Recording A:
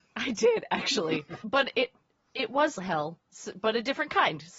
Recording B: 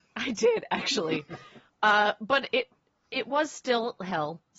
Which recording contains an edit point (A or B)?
A